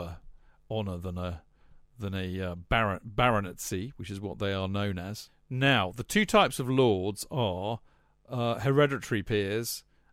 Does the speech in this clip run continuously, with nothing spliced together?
no; 1 cut; at 5.3 s

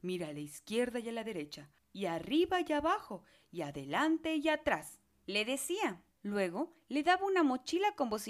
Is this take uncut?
yes; 0 cuts

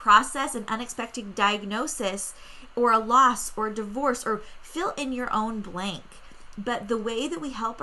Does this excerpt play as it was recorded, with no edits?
yes; 0 cuts

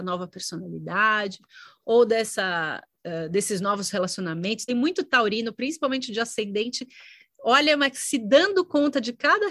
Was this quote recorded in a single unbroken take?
yes; 0 cuts

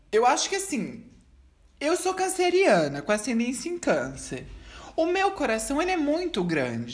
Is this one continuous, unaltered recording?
yes; 0 cuts

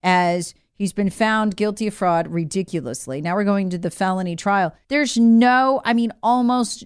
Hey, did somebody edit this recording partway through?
yes; 1 cut; at 4.8 s

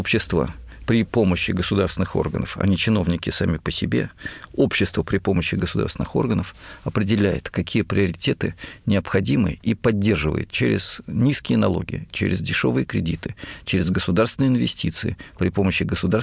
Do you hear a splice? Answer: no; 0 cuts

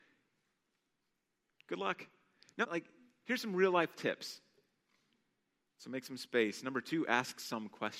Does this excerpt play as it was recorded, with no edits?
no; 2 cuts; at 2.6 s, 5.6 s

